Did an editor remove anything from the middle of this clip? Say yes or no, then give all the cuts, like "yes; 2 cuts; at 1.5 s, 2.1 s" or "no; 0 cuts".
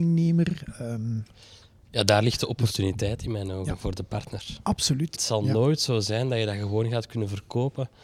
yes; 1 cut; at 5.1 s